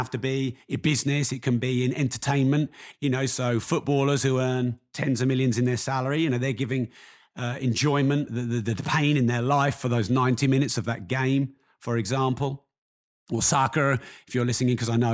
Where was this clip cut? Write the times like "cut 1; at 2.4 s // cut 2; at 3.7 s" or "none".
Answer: cut 1; at 2.9 s // cut 2; at 8.3 s